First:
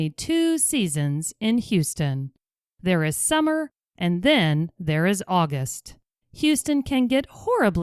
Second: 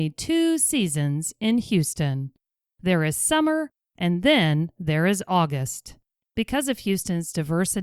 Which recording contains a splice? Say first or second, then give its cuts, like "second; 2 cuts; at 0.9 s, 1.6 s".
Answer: second; 1 cut; at 6.2 s